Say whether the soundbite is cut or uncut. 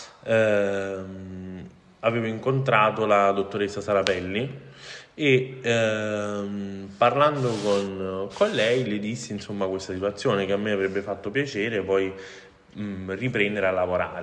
uncut